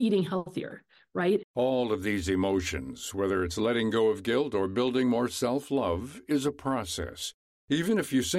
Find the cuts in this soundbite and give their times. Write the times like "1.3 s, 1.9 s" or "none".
1.4 s

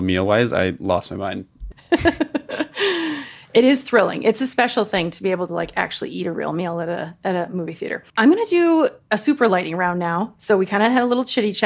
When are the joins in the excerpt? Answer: 1.7 s, 8.1 s

